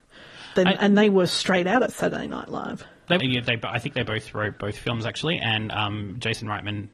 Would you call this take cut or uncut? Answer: cut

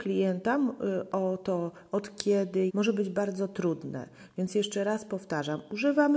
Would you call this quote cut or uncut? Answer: cut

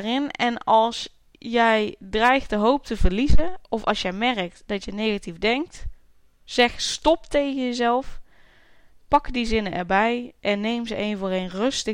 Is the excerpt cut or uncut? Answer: uncut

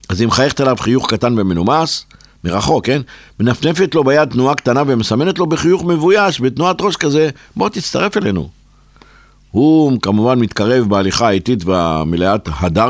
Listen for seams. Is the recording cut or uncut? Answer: uncut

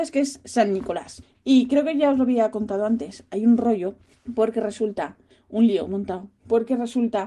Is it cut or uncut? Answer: uncut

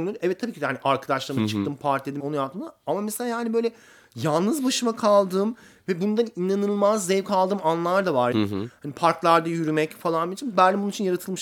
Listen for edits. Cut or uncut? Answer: cut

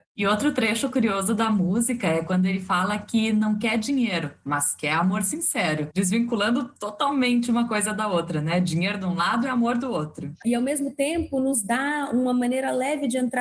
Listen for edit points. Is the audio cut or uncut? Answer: cut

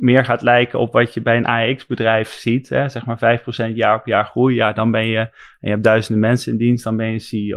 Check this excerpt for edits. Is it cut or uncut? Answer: uncut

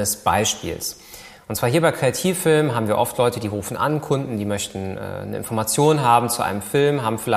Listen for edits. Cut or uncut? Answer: uncut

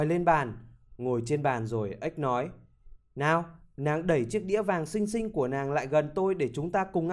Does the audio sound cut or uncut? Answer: uncut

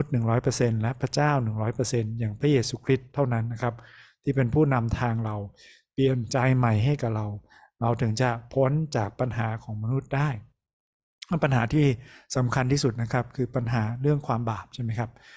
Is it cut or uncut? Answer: uncut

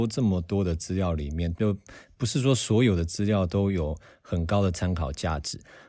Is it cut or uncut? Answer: cut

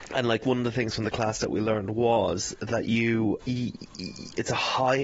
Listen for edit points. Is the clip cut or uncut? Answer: cut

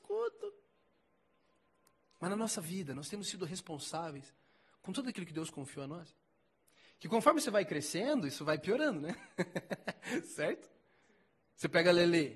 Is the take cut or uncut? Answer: uncut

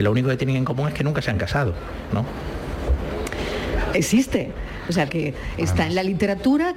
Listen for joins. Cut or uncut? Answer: cut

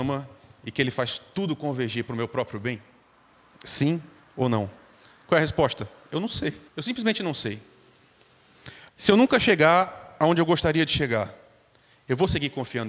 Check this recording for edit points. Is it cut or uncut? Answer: cut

